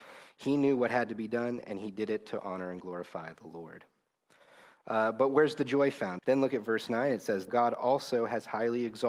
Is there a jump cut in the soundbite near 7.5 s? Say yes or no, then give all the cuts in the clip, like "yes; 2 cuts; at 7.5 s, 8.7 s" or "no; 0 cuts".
yes; 2 cuts; at 6.2 s, 7.5 s